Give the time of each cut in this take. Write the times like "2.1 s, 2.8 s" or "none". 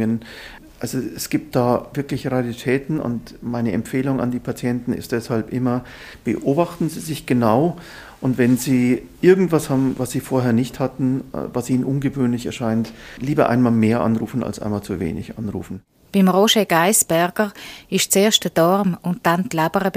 none